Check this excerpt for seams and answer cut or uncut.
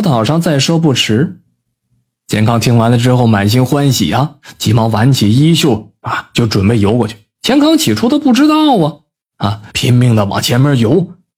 cut